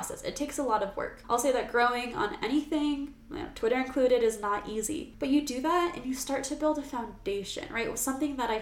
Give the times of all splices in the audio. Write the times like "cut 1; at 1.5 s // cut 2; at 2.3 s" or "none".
none